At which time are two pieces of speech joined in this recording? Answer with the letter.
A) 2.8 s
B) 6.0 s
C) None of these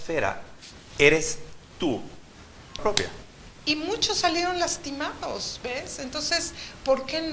A